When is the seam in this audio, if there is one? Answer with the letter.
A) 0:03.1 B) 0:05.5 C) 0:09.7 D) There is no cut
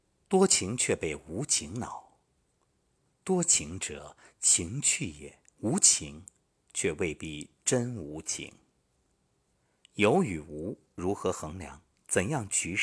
B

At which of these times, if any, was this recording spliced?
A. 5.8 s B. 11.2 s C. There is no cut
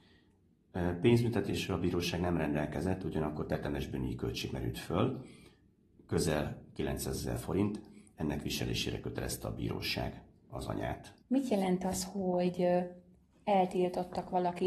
B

